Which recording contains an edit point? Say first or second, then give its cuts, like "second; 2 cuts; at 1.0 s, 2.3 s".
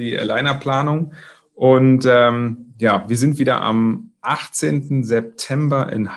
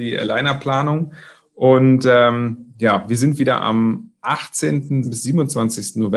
second; 1 cut; at 5.0 s